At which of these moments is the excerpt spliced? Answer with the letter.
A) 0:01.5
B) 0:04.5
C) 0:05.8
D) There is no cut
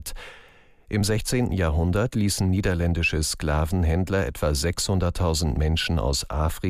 A